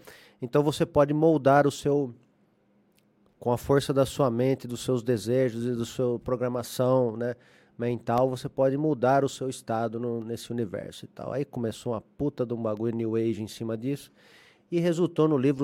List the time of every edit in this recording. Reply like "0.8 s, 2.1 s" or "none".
none